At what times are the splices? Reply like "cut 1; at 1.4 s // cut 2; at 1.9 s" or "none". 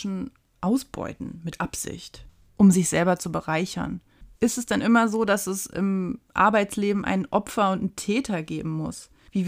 cut 1; at 4.3 s